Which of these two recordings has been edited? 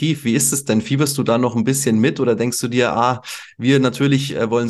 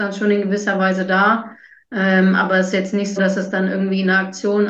second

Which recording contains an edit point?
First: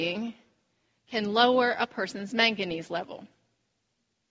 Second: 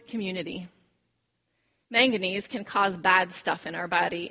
second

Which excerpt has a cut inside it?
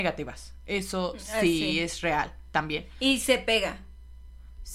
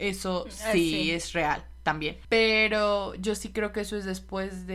second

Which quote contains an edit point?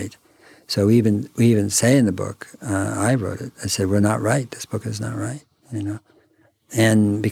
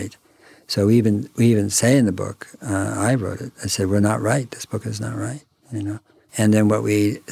second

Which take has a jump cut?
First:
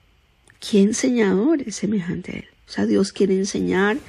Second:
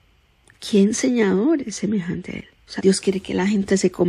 second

